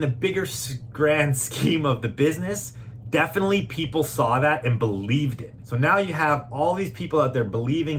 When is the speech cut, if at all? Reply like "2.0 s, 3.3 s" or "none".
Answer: 5.6 s